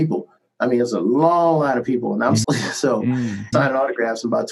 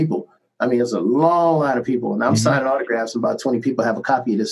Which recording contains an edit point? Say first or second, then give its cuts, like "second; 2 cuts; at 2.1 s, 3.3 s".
first; 2 cuts; at 2.4 s, 3.5 s